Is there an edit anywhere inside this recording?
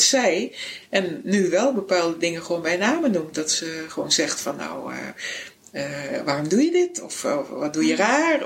no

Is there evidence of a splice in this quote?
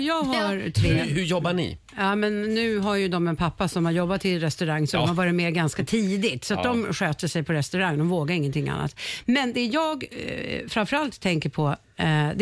no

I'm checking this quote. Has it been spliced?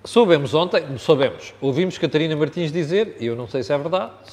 no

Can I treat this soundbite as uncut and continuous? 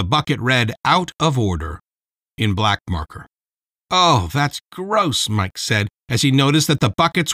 yes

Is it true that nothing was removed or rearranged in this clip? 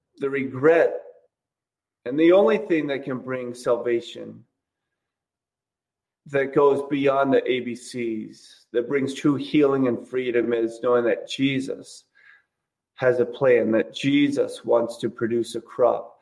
yes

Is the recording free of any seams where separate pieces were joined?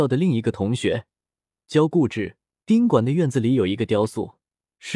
no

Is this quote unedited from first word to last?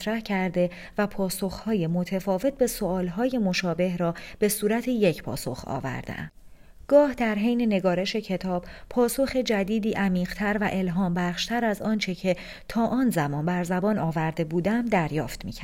yes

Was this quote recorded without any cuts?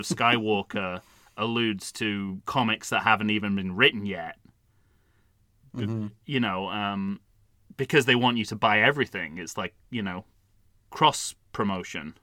yes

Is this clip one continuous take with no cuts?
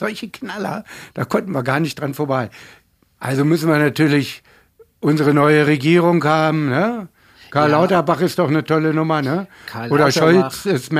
yes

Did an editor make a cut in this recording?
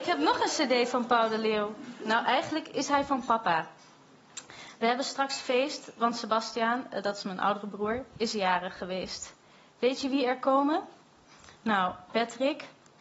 no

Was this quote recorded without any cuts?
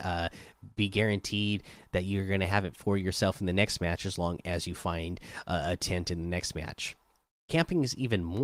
yes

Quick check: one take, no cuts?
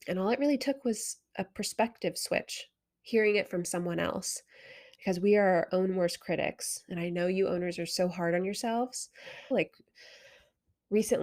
no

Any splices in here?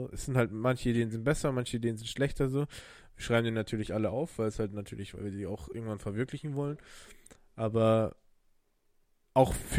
no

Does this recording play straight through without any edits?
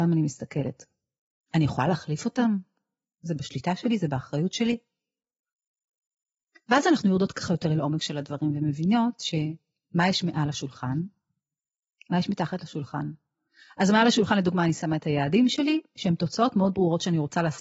no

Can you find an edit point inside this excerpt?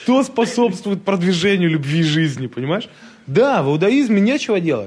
no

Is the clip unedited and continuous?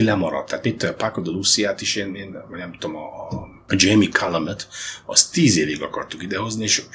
yes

